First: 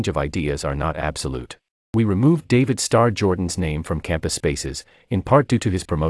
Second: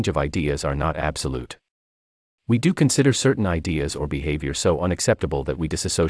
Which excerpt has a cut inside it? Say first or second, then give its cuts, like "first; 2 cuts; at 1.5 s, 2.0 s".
first; 1 cut; at 1.9 s